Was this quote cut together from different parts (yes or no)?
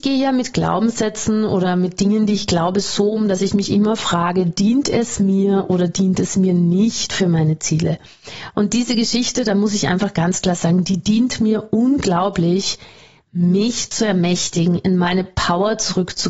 no